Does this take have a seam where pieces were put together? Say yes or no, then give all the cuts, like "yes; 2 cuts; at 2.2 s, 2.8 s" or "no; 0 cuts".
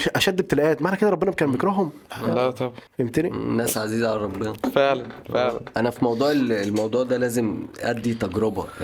yes; 1 cut; at 2.9 s